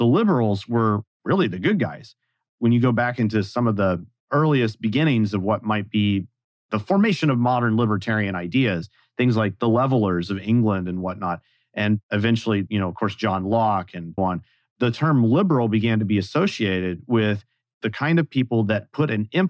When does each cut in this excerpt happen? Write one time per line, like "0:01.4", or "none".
0:12.7
0:14.2